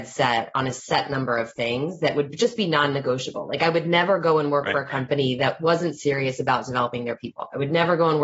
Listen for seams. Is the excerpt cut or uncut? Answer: uncut